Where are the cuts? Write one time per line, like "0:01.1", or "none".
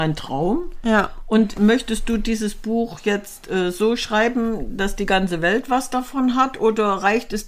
0:01.5